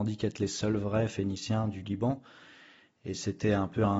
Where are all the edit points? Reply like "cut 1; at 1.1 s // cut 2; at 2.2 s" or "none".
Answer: none